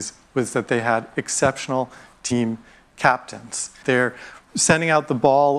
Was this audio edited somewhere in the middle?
yes; 1 cut; at 3.8 s

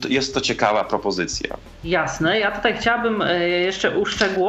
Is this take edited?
no; 0 cuts

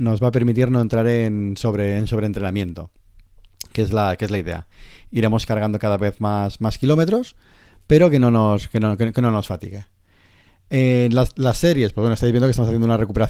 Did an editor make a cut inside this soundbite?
no; 0 cuts

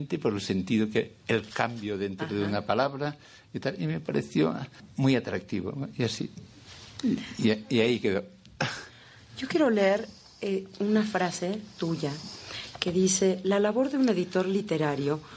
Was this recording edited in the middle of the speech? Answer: no; 0 cuts

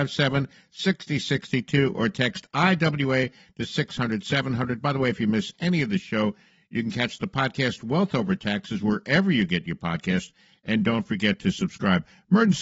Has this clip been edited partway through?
no; 0 cuts

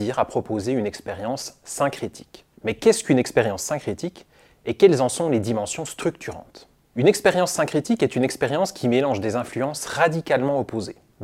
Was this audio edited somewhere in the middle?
no; 0 cuts

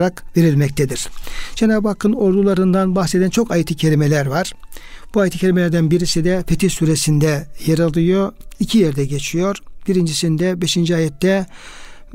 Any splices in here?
no; 0 cuts

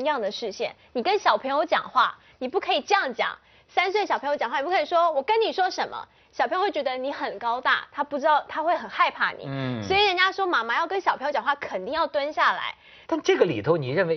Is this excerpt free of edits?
no; 1 cut; at 13.0 s

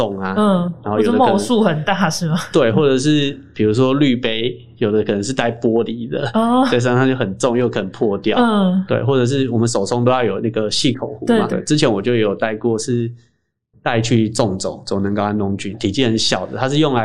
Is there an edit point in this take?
yes; 2 cuts; at 11.5 s, 15.7 s

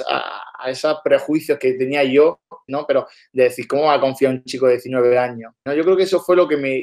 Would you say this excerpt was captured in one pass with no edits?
no; 2 cuts; at 2.7 s, 5.7 s

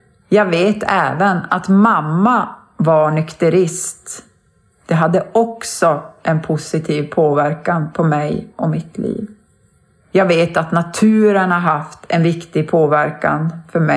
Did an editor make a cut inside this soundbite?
yes; 1 cut; at 9.9 s

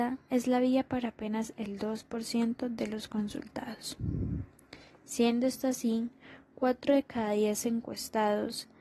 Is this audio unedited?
yes; 0 cuts

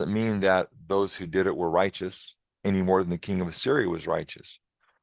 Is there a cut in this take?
no; 0 cuts

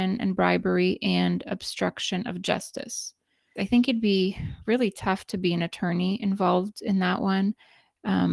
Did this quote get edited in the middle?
yes; 1 cut; at 3.6 s

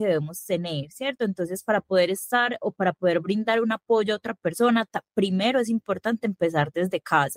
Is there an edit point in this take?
no; 0 cuts

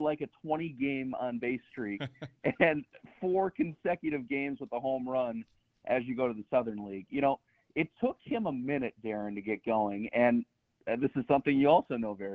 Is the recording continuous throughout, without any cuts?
yes; 0 cuts

